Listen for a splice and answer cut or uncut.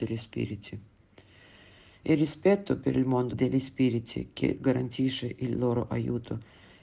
cut